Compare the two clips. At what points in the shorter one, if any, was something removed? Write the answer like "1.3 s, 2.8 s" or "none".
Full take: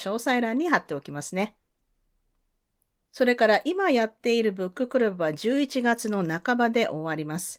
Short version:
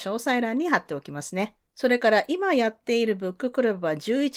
1.7 s